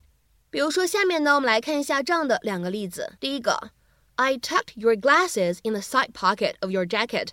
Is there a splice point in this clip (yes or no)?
yes